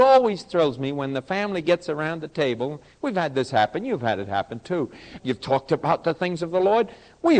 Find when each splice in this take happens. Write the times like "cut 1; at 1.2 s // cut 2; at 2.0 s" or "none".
cut 1; at 5.2 s